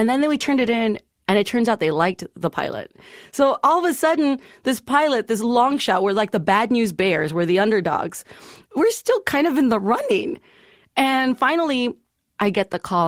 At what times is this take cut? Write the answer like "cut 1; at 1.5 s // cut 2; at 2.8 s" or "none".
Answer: none